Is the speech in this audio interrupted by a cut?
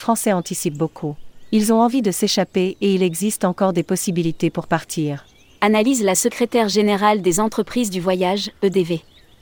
no; 0 cuts

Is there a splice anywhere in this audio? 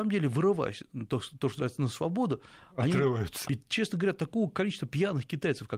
yes; 1 cut; at 3.4 s

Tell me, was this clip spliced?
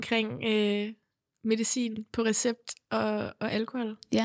no; 0 cuts

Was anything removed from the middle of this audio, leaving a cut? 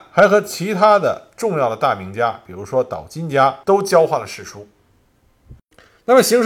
yes; 1 cut; at 3.6 s

